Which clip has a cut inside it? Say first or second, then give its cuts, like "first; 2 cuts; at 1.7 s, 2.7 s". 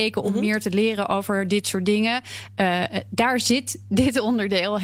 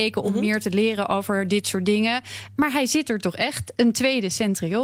second; 1 cut; at 2.6 s